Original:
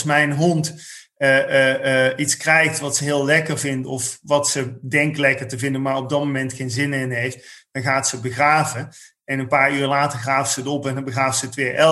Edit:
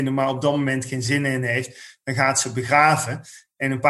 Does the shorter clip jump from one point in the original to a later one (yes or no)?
no